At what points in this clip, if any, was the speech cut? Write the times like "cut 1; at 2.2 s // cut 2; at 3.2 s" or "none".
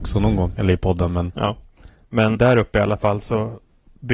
cut 1; at 1.3 s // cut 2; at 2.4 s

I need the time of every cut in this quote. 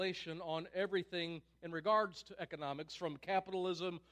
none

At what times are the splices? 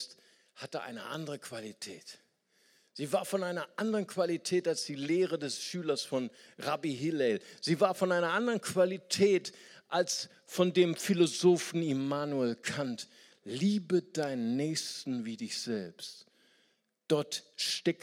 none

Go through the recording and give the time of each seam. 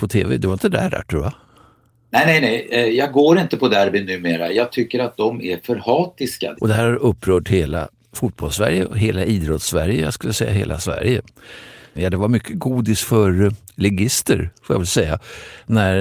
cut 1; at 6.6 s // cut 2; at 12.0 s

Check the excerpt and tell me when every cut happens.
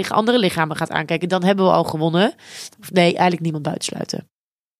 cut 1; at 2.7 s

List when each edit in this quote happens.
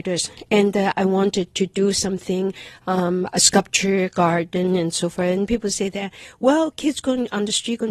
none

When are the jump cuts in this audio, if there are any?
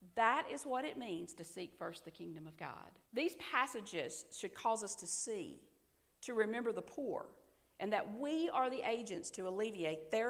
cut 1; at 3.1 s

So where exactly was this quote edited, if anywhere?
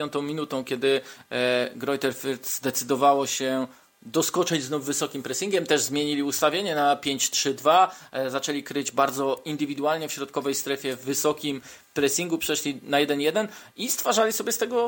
none

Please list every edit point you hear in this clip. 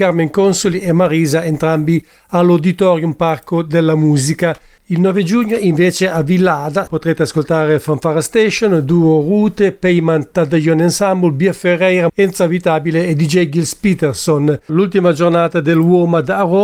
cut 1; at 6.9 s // cut 2; at 12.1 s // cut 3; at 14.7 s

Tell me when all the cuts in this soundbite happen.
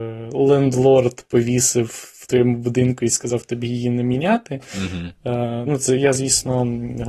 cut 1; at 5.6 s

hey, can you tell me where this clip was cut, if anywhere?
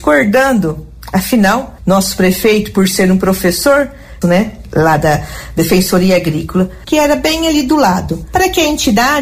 cut 1; at 4.2 s // cut 2; at 6.9 s

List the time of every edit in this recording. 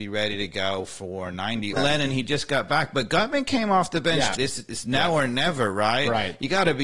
cut 1; at 1.8 s // cut 2; at 4.4 s

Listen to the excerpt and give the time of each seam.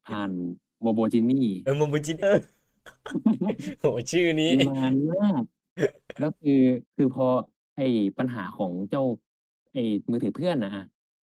cut 1; at 2.2 s // cut 2; at 6.9 s

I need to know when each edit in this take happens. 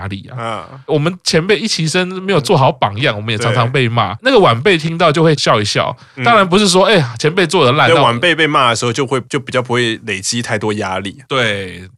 none

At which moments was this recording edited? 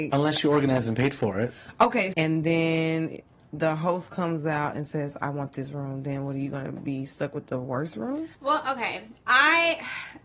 cut 1; at 2.1 s // cut 2; at 8.3 s

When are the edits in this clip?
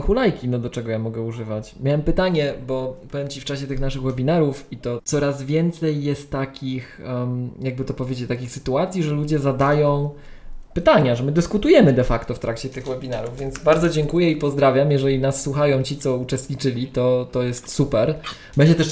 cut 1; at 5.0 s

